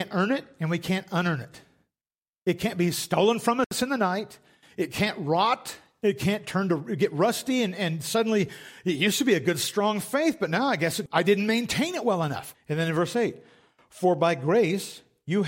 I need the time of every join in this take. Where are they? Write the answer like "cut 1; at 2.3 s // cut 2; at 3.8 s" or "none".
cut 1; at 11.1 s // cut 2; at 12.5 s